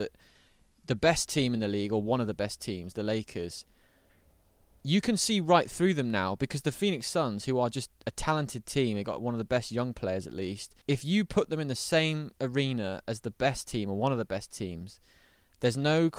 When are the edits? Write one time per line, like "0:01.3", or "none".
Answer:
0:10.8

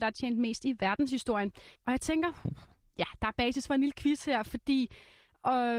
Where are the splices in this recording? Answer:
0:01.7

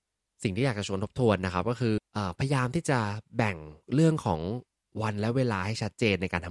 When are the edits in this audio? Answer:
0:02.0
0:03.8

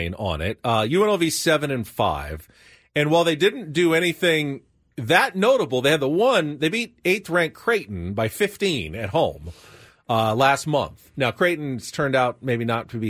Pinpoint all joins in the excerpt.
none

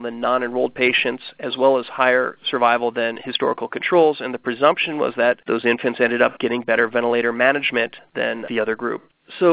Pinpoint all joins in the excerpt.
none

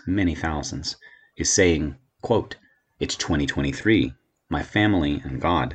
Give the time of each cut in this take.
0:04.4

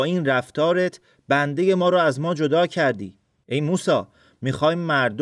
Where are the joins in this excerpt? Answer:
0:03.4

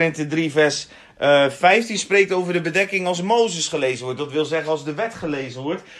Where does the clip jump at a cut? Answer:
none

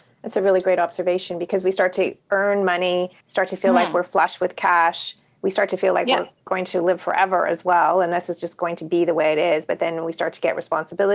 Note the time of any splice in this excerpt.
0:03.2

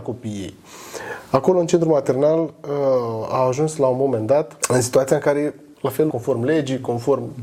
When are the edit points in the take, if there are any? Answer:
0:04.6
0:06.1

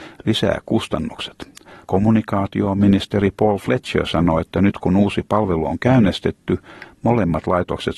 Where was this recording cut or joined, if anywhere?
0:01.8

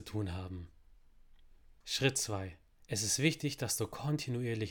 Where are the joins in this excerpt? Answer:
0:02.8

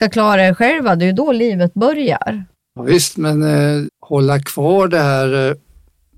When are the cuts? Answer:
0:02.5
0:03.9

